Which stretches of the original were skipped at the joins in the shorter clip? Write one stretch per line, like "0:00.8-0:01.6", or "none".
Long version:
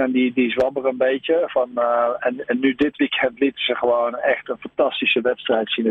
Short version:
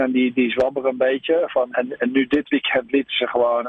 0:01.7-0:02.2